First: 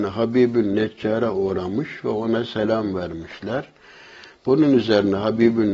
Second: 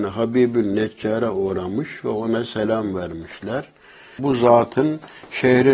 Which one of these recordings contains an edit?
second; 1 cut; at 4.2 s

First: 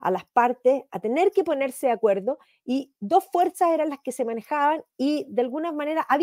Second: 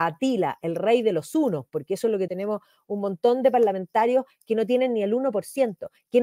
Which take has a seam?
second; 1 cut; at 2.3 s

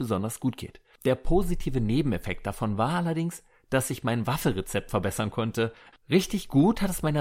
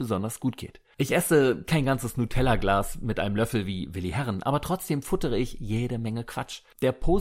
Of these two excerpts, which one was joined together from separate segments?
first; 2 cuts; at 0.9 s, 5.9 s

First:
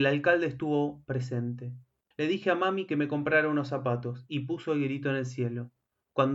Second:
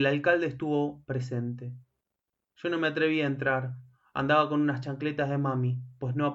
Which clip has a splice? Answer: first; 1 cut; at 2.1 s

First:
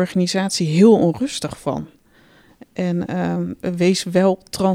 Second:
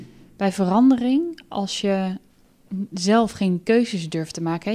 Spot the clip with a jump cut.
first; 1 cut; at 3.6 s

